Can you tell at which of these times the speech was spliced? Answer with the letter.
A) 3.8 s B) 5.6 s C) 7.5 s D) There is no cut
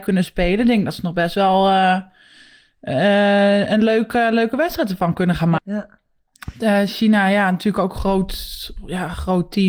B